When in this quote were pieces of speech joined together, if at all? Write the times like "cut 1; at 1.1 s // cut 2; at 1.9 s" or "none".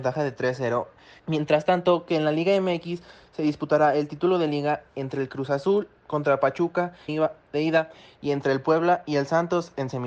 cut 1; at 1.2 s // cut 2; at 7.1 s